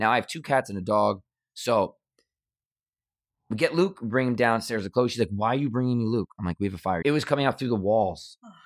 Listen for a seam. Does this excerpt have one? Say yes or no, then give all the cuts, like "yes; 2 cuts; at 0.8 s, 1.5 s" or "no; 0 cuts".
yes; 1 cut; at 7.0 s